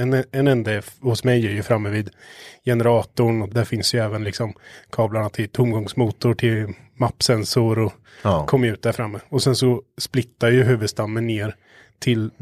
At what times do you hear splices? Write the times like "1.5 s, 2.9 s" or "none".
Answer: 3.5 s